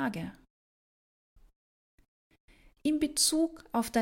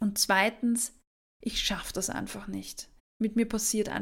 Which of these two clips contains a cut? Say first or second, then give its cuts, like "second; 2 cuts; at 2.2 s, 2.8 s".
second; 1 cut; at 3.0 s